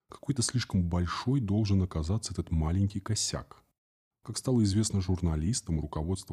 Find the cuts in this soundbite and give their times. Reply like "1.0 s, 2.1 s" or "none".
4.1 s